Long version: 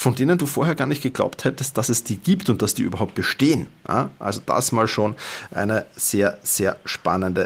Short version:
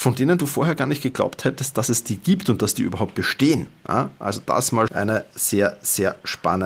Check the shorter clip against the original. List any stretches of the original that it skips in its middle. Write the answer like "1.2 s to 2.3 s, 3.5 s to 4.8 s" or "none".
4.9 s to 5.5 s